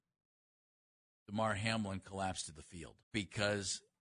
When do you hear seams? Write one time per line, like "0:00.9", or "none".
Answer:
0:03.0